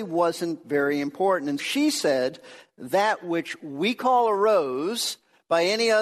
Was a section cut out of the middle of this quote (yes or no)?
yes